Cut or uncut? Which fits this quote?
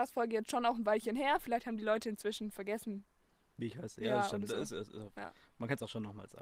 uncut